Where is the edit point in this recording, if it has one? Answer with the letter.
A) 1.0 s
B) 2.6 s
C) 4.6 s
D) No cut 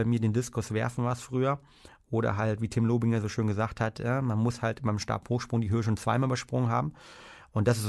D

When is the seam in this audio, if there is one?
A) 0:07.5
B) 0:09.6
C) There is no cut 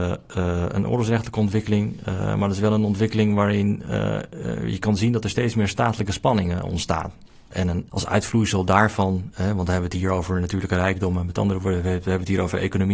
A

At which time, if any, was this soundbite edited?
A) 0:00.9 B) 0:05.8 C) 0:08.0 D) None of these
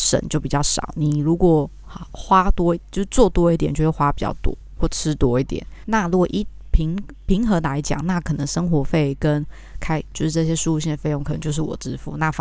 B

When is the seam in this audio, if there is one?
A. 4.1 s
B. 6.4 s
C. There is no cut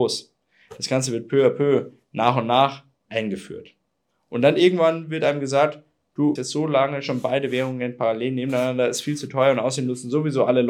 B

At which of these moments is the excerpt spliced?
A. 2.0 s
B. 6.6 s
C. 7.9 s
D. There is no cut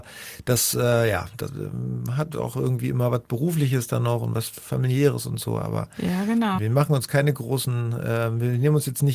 B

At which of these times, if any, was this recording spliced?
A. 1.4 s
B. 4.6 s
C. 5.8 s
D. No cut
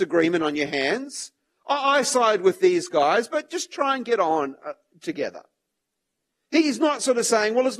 D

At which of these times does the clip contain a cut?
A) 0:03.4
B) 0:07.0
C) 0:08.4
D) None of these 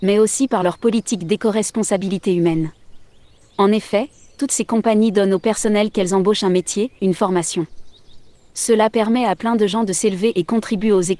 B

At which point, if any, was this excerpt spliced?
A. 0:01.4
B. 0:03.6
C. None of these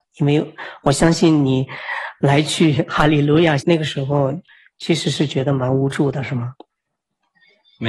B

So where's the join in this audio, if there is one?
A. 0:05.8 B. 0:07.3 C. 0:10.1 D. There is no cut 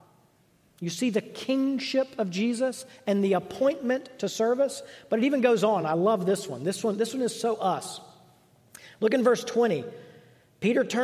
D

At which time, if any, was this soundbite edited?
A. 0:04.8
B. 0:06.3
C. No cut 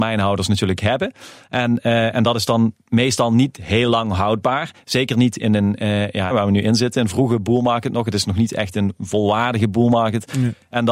B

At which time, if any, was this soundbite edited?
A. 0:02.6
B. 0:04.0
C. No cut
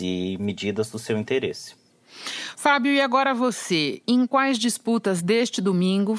C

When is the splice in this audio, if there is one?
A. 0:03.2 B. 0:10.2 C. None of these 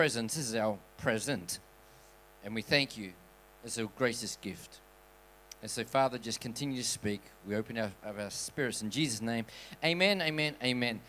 C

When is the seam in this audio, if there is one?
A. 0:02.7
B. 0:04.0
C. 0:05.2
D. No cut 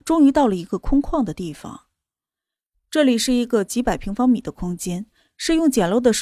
D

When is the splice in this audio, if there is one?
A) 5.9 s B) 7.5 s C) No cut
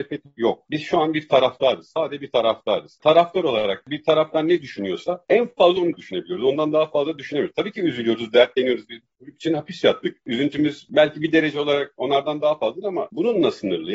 A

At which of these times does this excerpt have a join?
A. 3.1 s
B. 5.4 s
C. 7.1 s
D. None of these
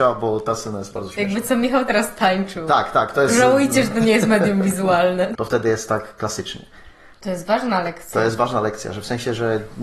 B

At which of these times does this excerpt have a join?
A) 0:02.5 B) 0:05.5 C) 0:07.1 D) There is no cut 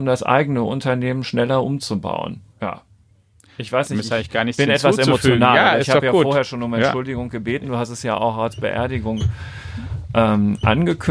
A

